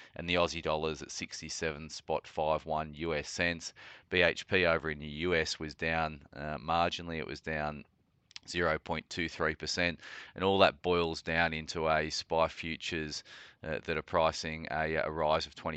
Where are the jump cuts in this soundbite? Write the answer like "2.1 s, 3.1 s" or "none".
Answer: none